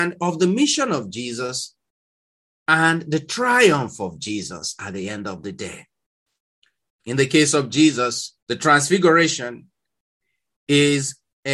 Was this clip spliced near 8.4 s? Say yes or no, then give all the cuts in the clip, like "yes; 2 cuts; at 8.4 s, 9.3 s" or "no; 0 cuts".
yes; 2 cuts; at 6.9 s, 8.4 s